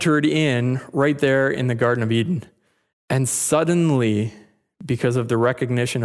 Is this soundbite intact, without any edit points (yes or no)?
no